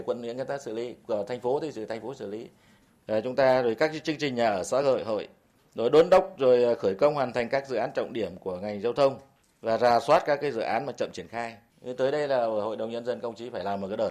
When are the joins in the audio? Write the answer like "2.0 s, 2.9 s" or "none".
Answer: none